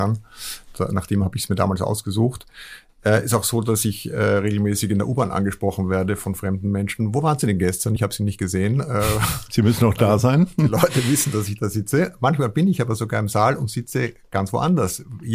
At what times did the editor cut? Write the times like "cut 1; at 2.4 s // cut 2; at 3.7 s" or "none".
none